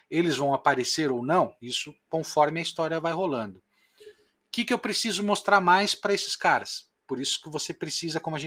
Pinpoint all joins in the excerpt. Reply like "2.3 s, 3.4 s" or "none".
none